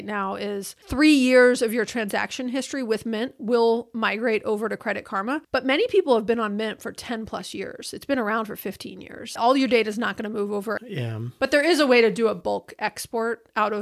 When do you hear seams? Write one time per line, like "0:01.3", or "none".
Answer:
0:09.4
0:10.8